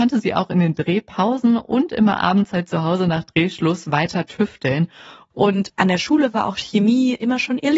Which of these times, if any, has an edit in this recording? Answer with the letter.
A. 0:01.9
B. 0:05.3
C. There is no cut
B